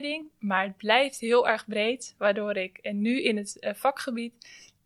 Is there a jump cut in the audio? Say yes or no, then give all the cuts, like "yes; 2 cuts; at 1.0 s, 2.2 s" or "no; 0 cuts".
no; 0 cuts